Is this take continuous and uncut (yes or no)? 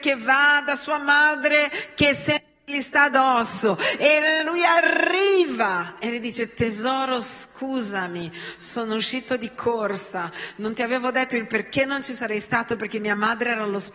no